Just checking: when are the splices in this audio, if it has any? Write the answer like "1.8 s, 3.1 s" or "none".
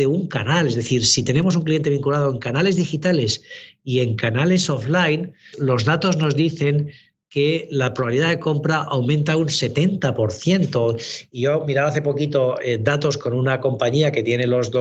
5.5 s